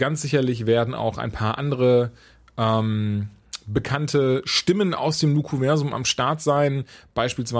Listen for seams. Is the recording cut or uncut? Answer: uncut